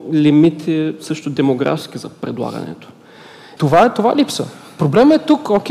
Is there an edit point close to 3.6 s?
yes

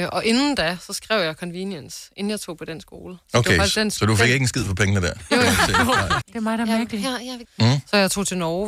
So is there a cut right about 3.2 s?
no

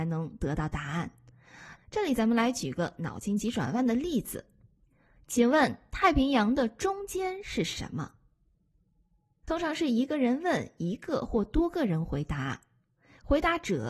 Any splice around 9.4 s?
yes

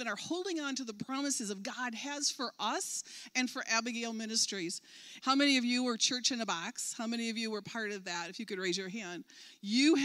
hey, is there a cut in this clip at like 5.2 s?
yes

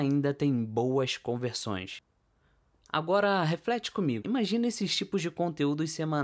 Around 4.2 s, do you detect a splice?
yes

